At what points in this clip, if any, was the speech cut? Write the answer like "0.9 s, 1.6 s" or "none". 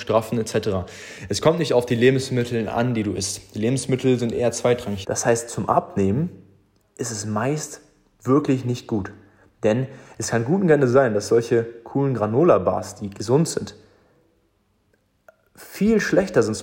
5.0 s